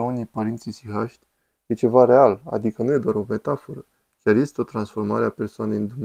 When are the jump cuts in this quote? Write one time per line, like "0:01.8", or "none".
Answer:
none